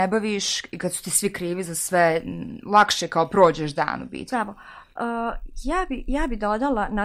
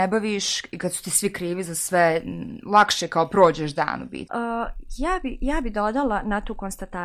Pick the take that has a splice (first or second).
second